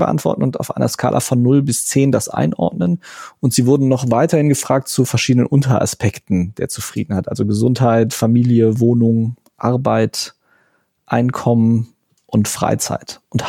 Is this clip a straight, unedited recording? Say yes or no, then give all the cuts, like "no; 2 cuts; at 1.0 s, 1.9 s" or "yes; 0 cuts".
yes; 0 cuts